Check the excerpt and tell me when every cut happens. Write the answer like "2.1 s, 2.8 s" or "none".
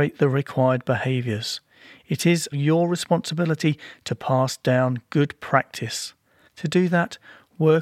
2.5 s, 6.5 s